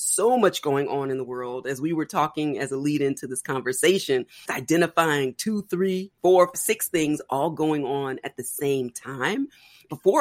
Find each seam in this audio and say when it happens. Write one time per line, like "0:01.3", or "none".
0:04.5
0:06.5